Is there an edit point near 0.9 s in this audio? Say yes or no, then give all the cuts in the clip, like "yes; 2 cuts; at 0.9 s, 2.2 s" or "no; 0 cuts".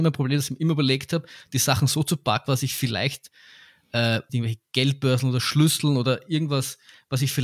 no; 2 cuts; at 2.5 s, 4.3 s